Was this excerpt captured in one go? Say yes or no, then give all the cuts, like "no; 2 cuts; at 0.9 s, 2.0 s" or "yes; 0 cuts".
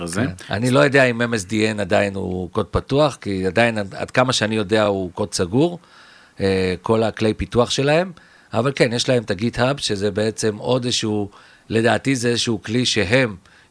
yes; 0 cuts